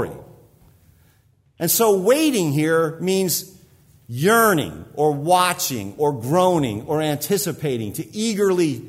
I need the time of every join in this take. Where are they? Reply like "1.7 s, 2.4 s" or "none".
none